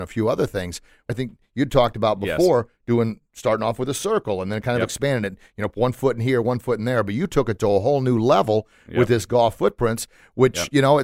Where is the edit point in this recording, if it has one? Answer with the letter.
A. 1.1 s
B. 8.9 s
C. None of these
A